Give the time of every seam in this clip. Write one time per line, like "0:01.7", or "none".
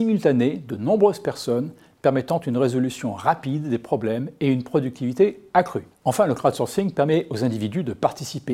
none